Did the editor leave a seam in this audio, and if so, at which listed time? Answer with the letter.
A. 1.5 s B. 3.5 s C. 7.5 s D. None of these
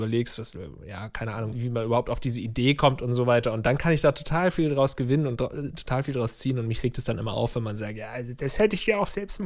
A